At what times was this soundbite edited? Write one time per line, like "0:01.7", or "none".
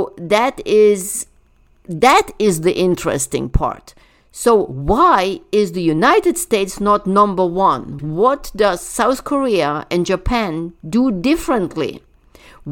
0:08.0